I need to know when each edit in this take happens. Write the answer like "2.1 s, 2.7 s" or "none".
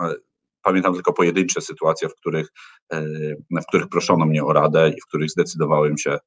none